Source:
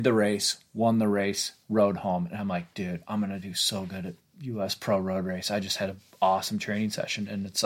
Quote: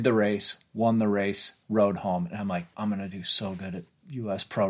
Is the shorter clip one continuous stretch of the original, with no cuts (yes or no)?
no